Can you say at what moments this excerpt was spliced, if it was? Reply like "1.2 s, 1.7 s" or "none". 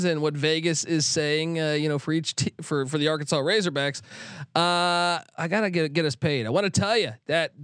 none